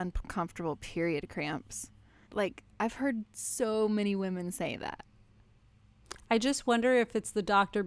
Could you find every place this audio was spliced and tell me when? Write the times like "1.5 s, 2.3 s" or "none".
2.3 s